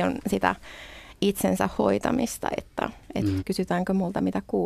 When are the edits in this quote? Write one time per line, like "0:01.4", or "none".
0:03.4